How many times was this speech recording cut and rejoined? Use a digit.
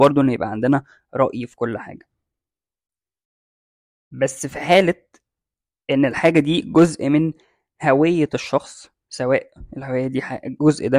0